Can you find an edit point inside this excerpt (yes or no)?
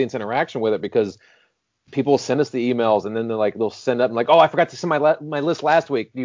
no